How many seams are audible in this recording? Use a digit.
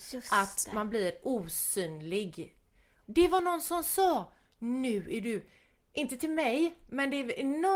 1